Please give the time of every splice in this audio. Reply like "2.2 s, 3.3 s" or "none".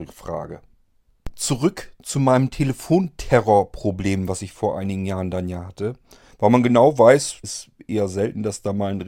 6.3 s, 7.4 s